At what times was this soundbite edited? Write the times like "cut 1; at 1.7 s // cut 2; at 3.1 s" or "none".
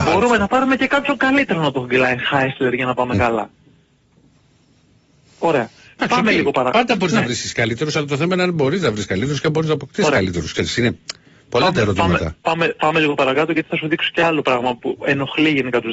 none